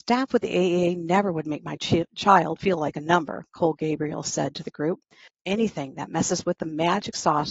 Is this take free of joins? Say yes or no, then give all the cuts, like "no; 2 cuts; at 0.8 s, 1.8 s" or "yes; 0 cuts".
no; 1 cut; at 5.3 s